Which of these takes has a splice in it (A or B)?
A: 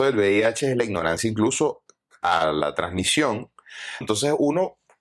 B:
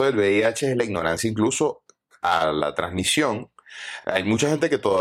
A